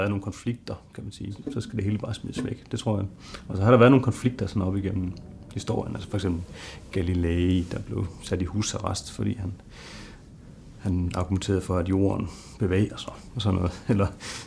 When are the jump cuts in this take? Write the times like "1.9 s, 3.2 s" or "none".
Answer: 1.4 s